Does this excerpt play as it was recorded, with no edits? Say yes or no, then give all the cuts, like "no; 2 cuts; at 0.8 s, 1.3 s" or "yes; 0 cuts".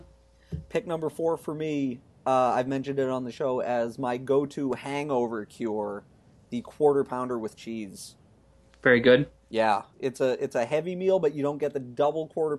no; 1 cut; at 9.9 s